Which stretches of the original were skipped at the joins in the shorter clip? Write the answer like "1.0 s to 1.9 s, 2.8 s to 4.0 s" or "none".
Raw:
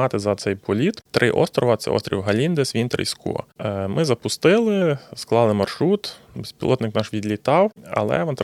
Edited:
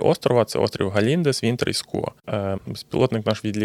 3.9 s to 6.3 s

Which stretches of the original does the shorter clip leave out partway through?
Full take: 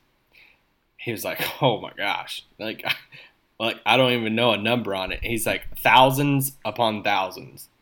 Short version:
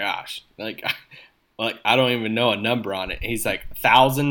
none

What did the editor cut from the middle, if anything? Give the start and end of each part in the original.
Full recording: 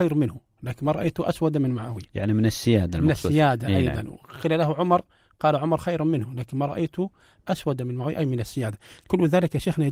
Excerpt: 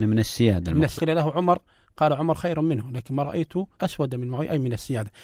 3.2 s to 4.4 s, 7.2 s to 7.4 s

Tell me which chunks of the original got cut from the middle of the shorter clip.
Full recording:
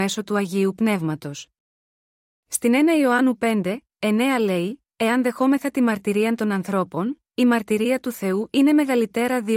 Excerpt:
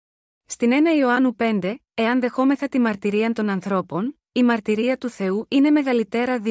3.9 s to 4.9 s

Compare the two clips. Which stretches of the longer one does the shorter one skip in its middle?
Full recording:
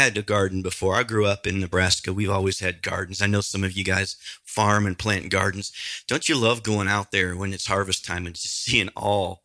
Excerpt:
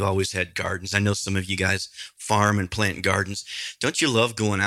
none

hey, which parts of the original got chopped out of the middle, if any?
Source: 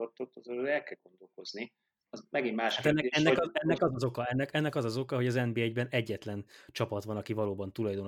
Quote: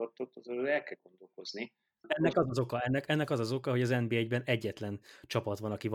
2.0 s to 3.5 s

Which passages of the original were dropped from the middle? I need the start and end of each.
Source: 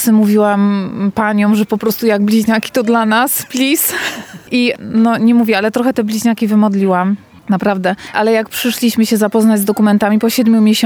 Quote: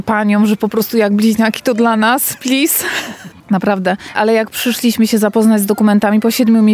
4.4 s to 7.3 s

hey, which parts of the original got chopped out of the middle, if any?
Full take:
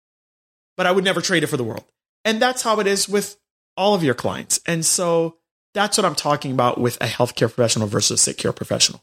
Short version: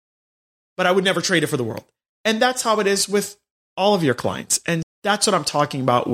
4.8 s to 5.5 s

